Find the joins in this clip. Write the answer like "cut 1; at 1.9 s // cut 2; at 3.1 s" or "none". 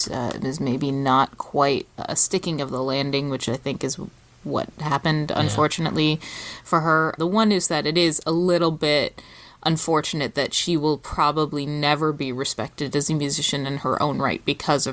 cut 1; at 7.2 s